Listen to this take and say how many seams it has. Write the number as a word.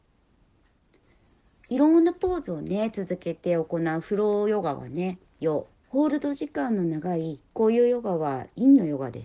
one